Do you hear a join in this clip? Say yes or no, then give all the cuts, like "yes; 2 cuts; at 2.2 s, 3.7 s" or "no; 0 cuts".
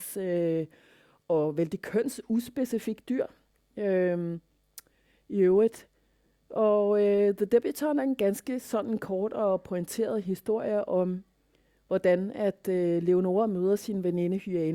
no; 0 cuts